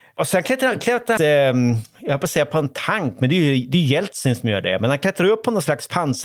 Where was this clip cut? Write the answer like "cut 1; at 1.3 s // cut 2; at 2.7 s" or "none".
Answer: cut 1; at 1.2 s